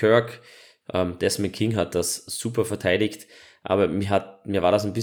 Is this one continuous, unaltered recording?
yes; 0 cuts

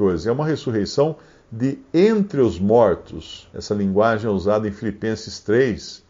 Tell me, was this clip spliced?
yes; 1 cut; at 3.5 s

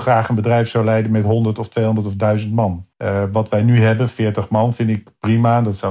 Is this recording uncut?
no; 1 cut; at 2.9 s

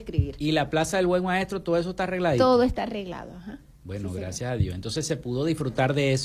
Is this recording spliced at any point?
no; 0 cuts

